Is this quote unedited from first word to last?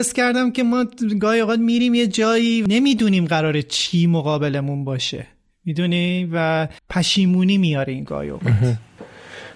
no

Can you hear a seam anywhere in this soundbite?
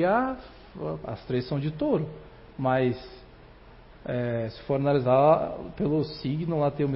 yes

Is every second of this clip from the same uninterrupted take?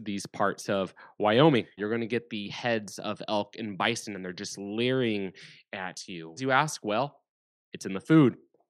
no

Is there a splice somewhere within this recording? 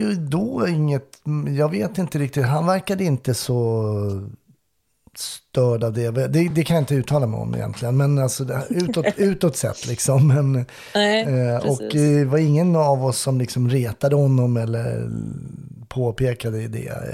no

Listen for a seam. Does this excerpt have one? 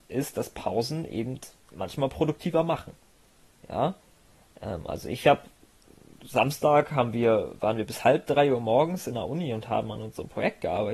no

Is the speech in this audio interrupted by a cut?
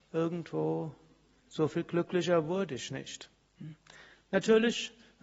no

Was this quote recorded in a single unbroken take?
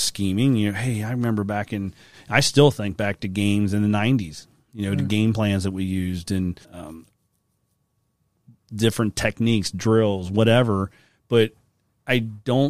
no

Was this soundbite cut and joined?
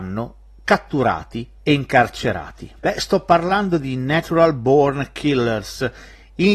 yes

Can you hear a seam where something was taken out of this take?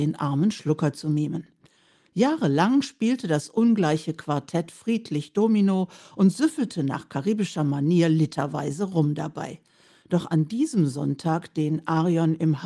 no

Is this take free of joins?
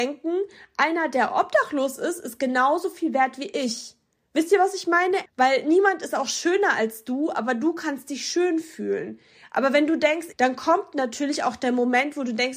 no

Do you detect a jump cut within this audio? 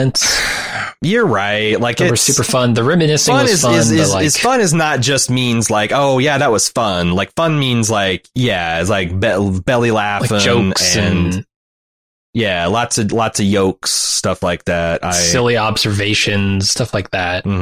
no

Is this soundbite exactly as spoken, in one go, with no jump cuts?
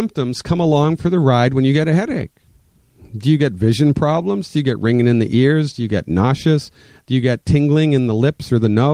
yes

